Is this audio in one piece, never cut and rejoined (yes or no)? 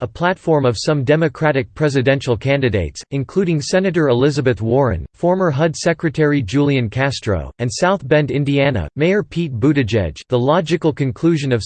no